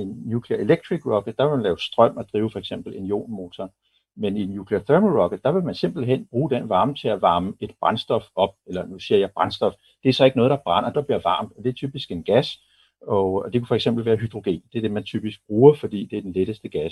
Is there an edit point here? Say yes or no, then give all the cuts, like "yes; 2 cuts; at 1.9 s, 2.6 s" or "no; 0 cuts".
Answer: yes; 1 cut; at 10.9 s